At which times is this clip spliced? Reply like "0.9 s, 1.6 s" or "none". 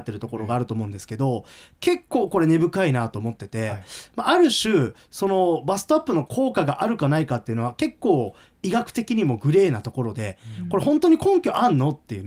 none